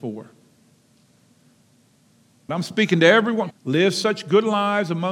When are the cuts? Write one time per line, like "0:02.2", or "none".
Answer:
0:02.5
0:03.5